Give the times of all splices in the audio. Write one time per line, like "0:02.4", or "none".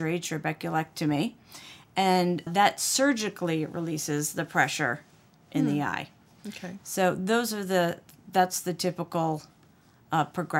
0:02.5